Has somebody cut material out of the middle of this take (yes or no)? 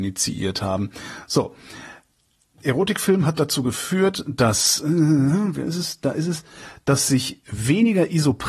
yes